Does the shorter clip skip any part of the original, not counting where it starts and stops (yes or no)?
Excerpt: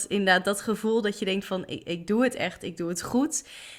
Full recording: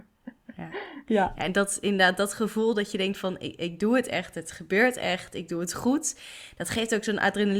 yes